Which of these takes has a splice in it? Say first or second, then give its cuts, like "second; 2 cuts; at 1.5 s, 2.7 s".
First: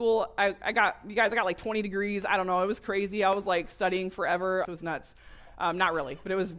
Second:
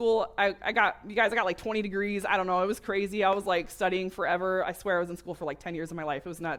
first; 1 cut; at 4.7 s